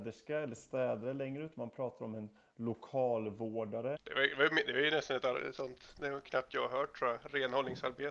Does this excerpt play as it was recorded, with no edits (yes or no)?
no